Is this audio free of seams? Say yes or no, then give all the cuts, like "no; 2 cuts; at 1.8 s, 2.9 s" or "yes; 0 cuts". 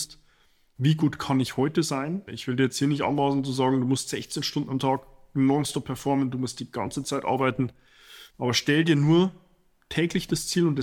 no; 2 cuts; at 2.3 s, 8.3 s